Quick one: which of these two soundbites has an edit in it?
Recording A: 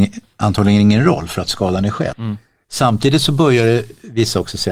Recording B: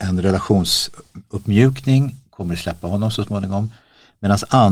A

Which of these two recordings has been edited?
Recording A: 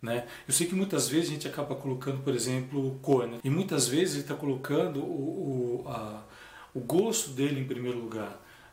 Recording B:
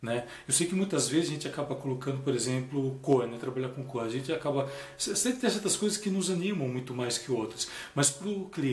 A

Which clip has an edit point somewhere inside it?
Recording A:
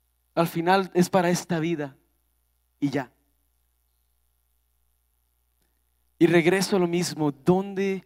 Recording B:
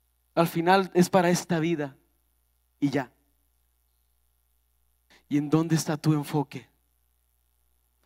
B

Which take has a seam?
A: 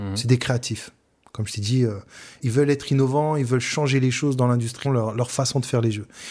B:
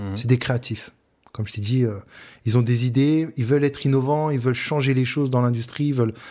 A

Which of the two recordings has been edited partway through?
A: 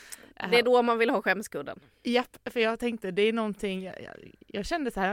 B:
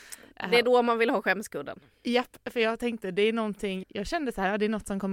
B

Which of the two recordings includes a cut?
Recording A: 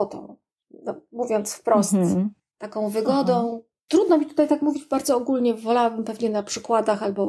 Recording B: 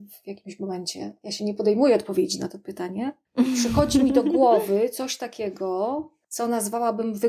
A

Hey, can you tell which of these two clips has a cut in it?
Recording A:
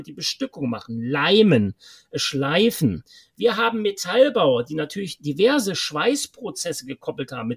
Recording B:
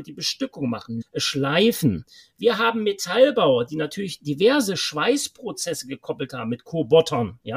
B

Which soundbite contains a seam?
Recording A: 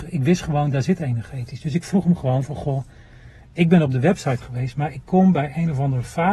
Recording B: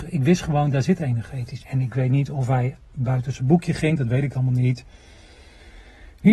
B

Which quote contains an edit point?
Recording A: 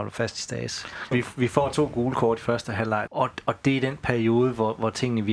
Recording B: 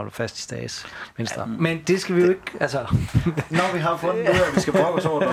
A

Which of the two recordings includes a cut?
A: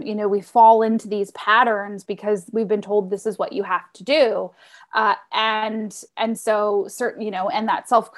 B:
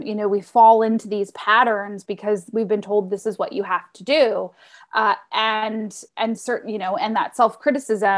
B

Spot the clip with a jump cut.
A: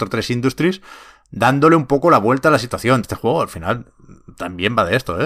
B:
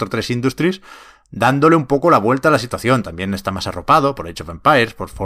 A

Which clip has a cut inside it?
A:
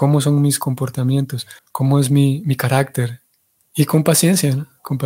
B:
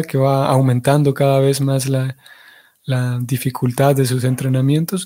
A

